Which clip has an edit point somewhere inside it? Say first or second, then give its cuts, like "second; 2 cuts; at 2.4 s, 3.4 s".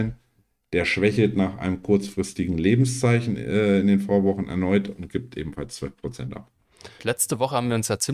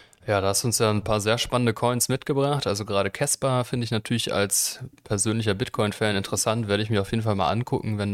first; 1 cut; at 7.0 s